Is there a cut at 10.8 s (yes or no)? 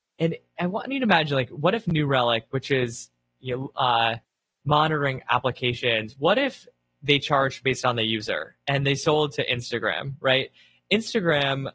no